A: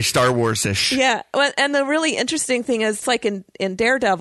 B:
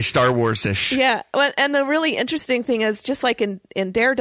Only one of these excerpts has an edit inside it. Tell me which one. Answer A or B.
A